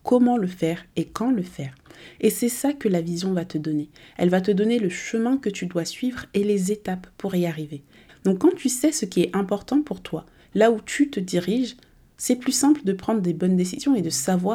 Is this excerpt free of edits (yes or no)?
no